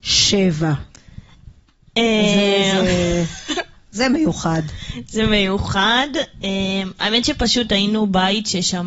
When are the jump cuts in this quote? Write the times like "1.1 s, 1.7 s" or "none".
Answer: none